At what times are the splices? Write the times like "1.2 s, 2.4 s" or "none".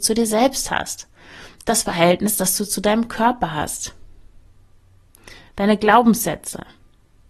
none